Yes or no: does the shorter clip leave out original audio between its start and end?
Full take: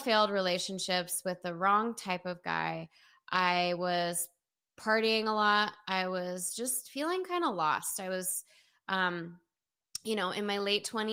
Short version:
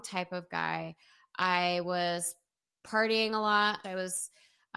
yes